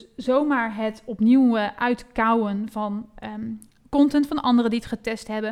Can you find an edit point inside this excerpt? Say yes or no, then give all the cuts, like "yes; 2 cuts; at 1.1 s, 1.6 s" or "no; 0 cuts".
no; 0 cuts